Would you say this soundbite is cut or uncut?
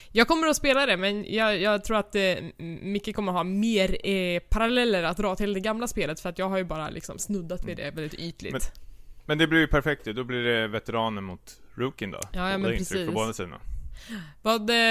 uncut